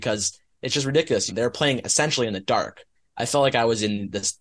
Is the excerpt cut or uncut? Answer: cut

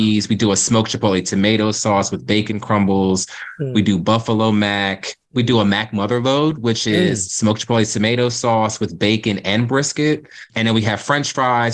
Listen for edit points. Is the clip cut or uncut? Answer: uncut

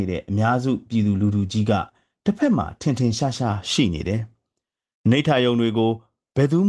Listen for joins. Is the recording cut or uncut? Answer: uncut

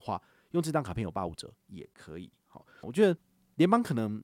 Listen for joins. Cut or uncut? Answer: cut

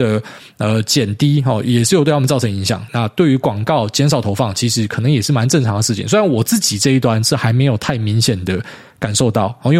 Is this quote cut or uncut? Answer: cut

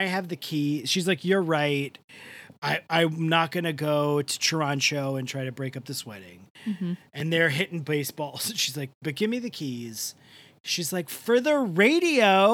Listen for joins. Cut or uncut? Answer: uncut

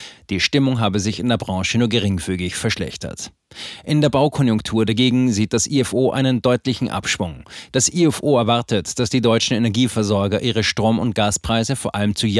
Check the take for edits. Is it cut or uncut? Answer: cut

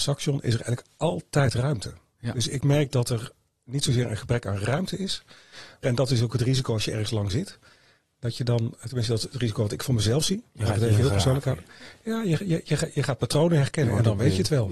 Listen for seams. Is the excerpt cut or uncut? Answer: cut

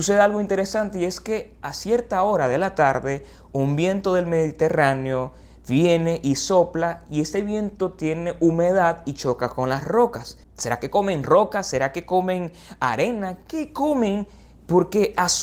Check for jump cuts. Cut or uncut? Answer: cut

